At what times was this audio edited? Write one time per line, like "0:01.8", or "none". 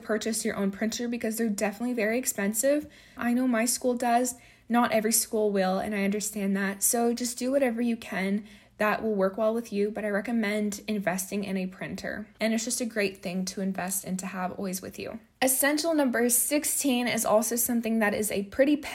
0:03.2
0:12.4